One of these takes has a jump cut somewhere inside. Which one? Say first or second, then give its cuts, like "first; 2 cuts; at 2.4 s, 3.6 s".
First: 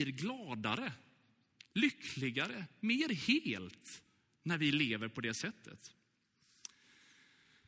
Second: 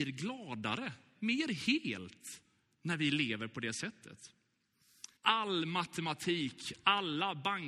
second; 2 cuts; at 1.1 s, 5.2 s